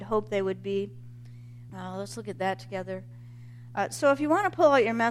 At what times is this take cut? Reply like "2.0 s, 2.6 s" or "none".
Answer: 1.7 s, 3.7 s

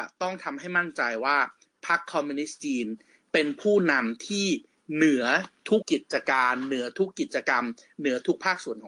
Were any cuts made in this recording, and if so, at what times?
5.8 s

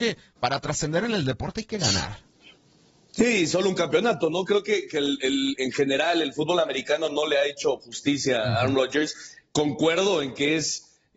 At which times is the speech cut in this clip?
none

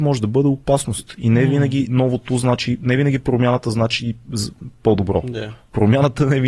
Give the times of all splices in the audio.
none

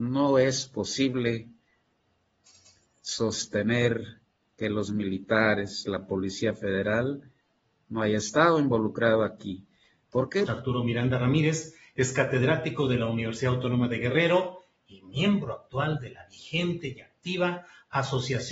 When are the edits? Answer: 10.5 s

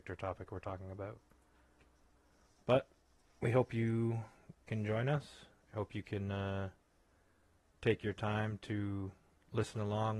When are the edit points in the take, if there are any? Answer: none

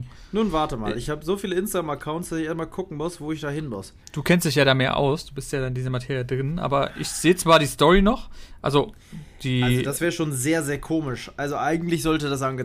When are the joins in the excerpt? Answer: none

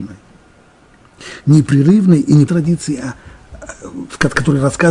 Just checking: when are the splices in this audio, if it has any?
2.5 s

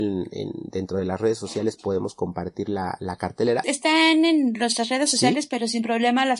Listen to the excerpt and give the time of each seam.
3.6 s

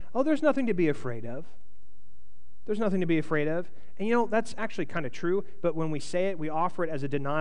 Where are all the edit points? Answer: none

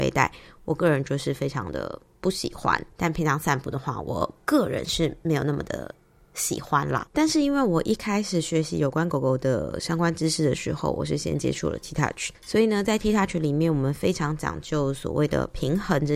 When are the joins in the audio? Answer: 2.9 s, 7.1 s

